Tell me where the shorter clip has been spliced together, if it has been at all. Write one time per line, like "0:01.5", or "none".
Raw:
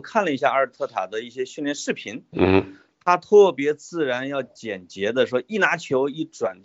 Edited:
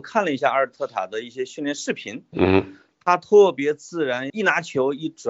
0:04.3